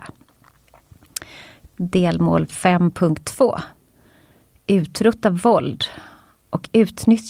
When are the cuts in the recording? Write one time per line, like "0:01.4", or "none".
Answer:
0:01.7